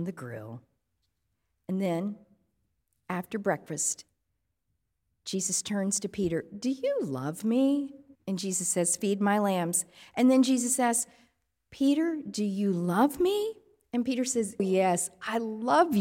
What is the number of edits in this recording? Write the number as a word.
two